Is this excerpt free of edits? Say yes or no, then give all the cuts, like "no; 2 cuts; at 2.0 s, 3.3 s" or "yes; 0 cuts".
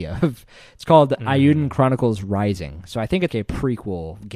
no; 1 cut; at 3.3 s